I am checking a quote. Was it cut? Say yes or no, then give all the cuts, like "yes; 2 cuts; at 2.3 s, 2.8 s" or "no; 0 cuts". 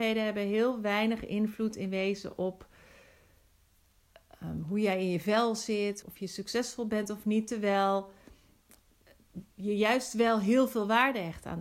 yes; 2 cuts; at 6.0 s, 9.5 s